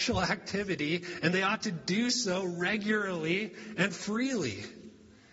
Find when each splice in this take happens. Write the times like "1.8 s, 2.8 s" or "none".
none